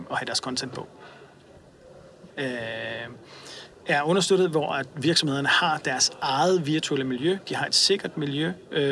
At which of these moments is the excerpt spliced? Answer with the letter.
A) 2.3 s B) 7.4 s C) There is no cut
A